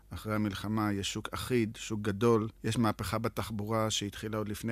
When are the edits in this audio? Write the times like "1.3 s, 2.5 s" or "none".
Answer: 2.5 s